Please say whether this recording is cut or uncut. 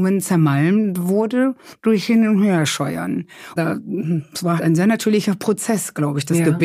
cut